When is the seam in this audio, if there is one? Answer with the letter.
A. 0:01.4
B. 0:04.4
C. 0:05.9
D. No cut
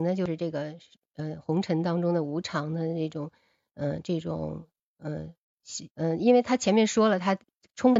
C